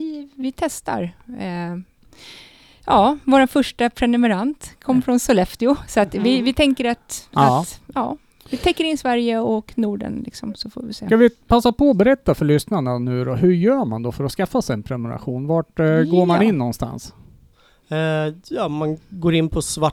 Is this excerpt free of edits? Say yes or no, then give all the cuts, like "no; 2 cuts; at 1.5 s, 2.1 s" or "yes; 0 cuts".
yes; 0 cuts